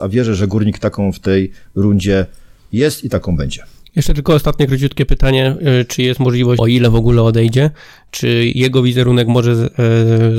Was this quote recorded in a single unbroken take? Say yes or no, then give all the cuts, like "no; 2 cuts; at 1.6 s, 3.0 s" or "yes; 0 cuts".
no; 1 cut; at 6.6 s